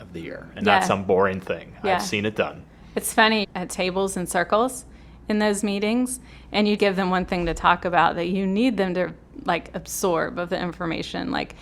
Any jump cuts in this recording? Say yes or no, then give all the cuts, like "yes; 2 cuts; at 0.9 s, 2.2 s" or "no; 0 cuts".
yes; 2 cuts; at 3.4 s, 6.8 s